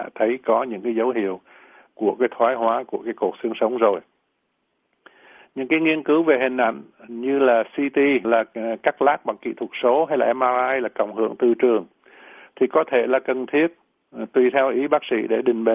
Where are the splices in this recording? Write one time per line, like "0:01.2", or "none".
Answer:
0:08.2